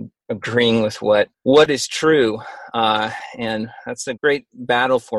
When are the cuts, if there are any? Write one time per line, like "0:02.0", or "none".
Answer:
0:01.3
0:04.2